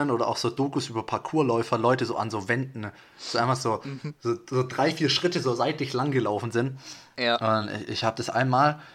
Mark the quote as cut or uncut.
uncut